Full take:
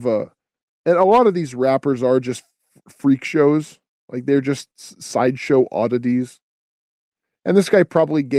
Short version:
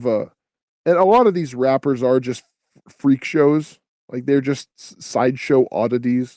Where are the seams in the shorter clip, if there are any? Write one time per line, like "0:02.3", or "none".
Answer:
none